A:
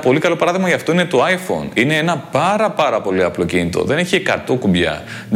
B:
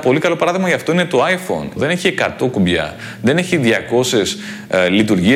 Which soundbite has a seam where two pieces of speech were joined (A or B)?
B